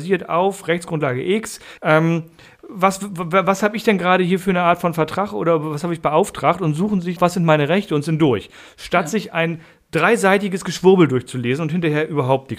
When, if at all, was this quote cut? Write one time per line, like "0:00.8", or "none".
0:01.8
0:07.2